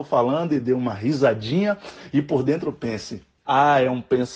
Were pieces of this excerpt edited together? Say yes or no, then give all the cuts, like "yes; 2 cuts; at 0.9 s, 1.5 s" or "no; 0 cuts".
yes; 1 cut; at 3.5 s